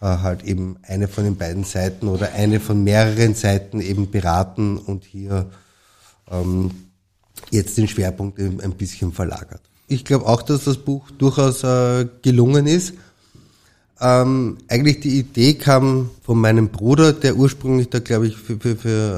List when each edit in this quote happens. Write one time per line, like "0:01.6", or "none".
0:09.9
0:16.2